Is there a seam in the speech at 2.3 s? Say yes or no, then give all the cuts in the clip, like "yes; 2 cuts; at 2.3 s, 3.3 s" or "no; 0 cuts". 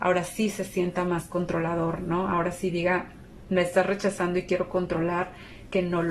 no; 0 cuts